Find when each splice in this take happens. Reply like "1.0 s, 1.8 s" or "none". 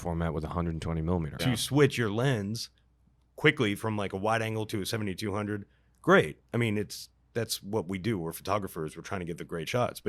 1.4 s